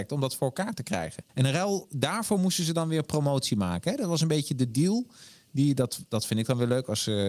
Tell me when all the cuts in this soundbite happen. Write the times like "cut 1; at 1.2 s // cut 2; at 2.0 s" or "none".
cut 1; at 1.3 s